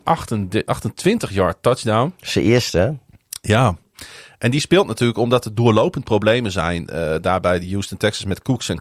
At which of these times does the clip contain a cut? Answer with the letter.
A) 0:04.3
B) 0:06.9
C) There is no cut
C